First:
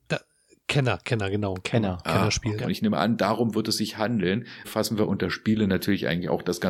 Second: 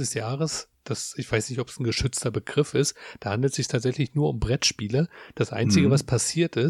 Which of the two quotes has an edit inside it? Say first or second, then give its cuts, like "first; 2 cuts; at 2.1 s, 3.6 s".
first; 2 cuts; at 2.6 s, 4.6 s